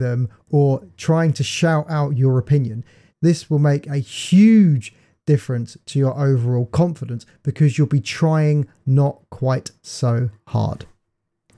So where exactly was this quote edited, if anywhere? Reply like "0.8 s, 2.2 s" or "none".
3.1 s